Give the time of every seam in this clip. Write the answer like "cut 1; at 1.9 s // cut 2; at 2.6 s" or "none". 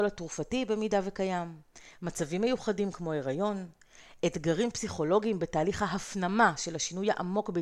none